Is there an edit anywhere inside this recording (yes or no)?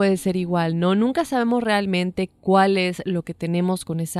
no